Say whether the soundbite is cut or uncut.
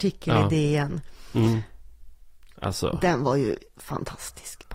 uncut